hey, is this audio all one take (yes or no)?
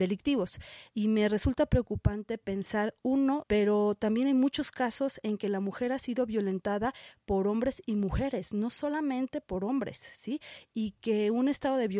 no